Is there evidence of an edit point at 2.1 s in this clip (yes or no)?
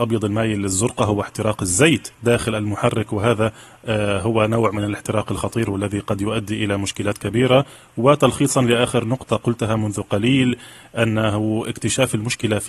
yes